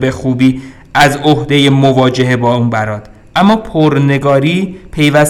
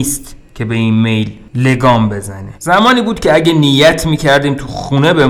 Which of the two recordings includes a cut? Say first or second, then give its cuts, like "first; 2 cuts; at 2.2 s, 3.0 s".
second; 1 cut; at 2.6 s